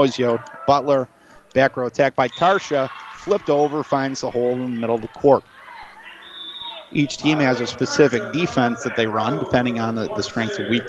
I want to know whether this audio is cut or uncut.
uncut